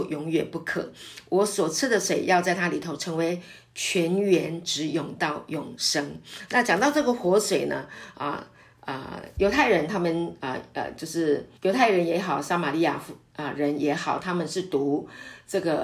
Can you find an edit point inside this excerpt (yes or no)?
yes